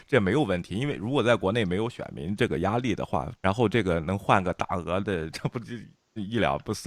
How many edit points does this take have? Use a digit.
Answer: 2